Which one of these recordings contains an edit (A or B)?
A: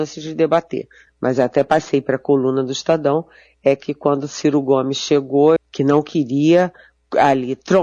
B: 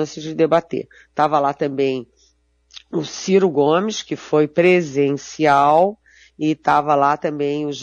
A